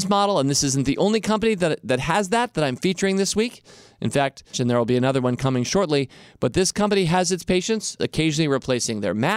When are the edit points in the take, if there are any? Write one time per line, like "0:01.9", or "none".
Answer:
0:04.5
0:08.0